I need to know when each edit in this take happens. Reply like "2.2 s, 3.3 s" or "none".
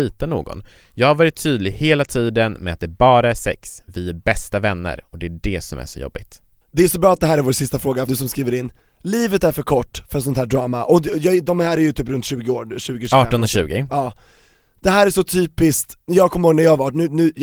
6.6 s, 8.1 s